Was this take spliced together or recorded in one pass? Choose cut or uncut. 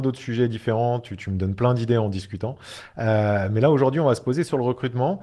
uncut